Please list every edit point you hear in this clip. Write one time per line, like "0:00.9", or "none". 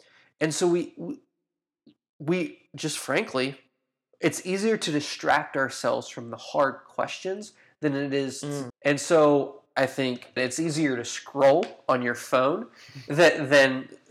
0:08.7
0:10.4